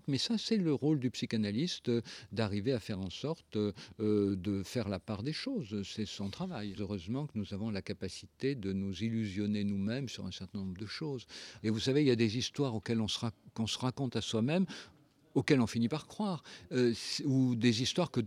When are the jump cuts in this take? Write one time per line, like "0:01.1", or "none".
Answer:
0:06.8
0:11.6